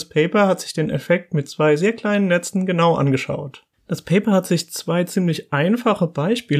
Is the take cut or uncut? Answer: uncut